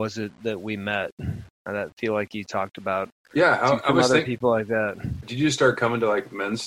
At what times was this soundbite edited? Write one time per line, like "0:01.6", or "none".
0:05.2